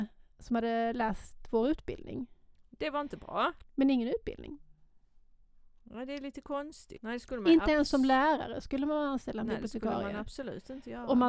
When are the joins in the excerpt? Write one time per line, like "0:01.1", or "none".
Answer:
0:03.6
0:07.0